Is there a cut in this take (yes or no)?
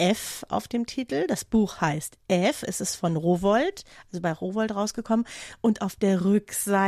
no